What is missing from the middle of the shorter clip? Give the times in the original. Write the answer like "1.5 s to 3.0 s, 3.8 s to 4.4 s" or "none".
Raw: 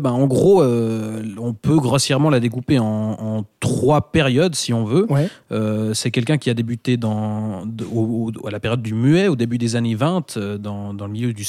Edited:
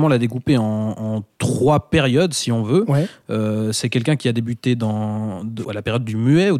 7.9 s to 8.4 s